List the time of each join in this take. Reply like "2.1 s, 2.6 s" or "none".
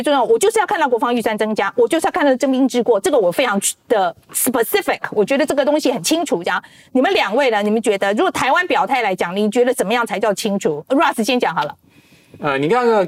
none